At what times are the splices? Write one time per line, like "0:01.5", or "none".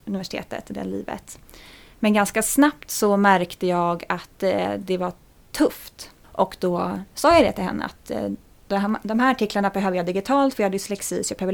0:06.2